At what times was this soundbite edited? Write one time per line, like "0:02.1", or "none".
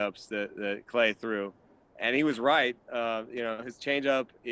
none

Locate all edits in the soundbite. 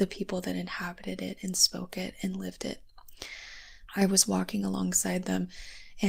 0:03.9

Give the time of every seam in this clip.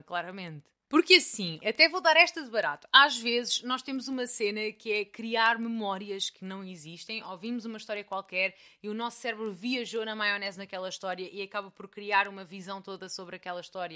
0:01.6

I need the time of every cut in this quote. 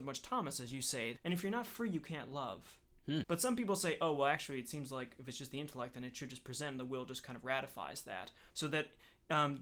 0:01.2
0:03.2
0:08.5

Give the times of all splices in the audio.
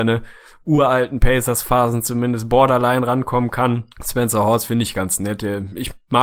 0:03.9

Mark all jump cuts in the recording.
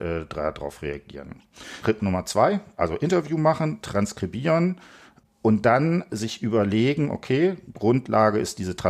0:01.8

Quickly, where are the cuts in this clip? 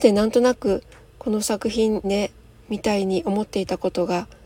0:02.0

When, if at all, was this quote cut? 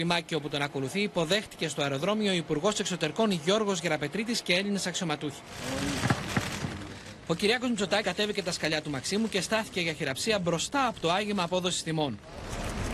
0:08.0

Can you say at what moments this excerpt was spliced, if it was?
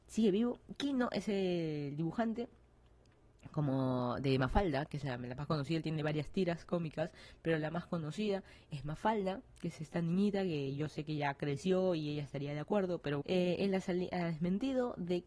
0:13.2

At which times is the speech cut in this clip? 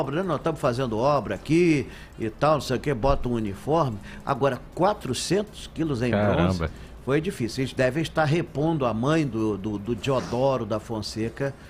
none

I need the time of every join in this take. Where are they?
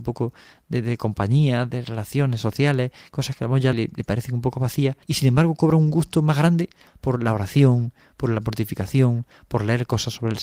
0:03.7
0:05.0

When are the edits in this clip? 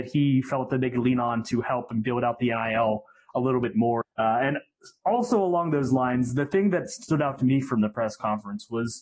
0:04.0

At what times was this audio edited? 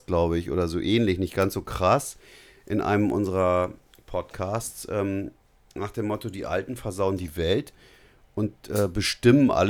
none

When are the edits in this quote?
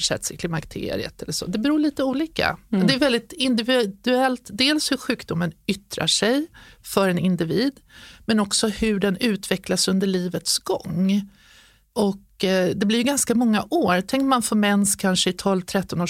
none

